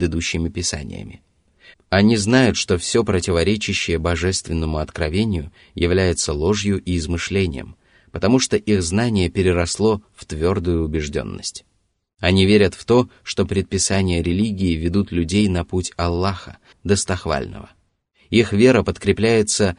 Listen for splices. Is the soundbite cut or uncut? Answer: cut